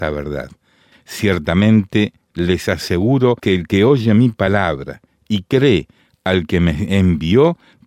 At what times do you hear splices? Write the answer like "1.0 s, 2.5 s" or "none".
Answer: 0.9 s, 3.4 s

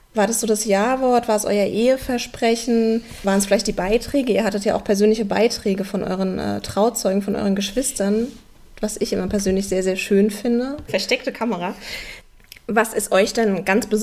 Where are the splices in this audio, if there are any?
10.9 s

